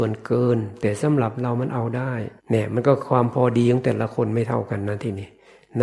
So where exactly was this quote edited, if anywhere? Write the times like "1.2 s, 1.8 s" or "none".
2.4 s